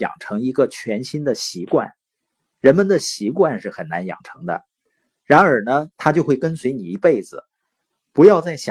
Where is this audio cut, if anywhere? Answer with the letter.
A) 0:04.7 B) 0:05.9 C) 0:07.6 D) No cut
B